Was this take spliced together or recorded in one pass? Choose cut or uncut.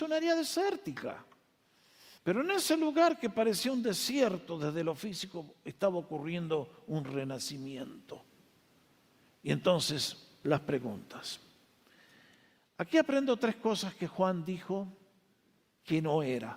cut